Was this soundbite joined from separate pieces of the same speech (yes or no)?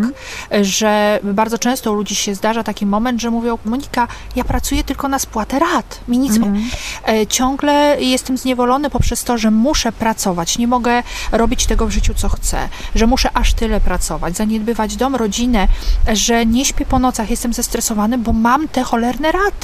yes